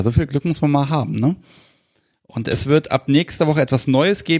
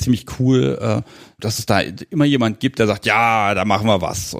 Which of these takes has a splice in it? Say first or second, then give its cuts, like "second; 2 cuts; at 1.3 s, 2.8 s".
second; 1 cut; at 1.4 s